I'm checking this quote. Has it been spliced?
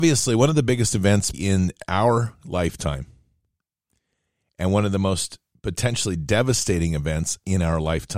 yes; 1 cut; at 1.3 s

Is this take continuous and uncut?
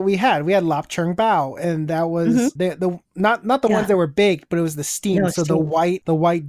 no; 1 cut; at 2.6 s

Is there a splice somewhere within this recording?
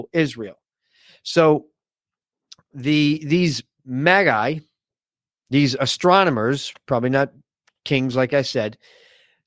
no; 0 cuts

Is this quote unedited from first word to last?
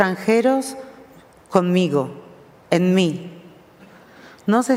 yes; 0 cuts

